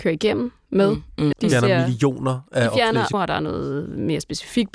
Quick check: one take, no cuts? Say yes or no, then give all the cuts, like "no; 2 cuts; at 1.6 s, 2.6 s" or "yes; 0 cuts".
no; 2 cuts; at 1.3 s, 3.1 s